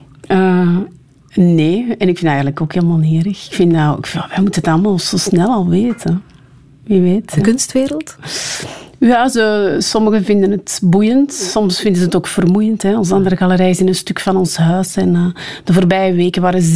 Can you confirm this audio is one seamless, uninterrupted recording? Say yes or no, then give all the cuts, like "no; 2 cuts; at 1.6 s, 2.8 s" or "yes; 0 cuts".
yes; 0 cuts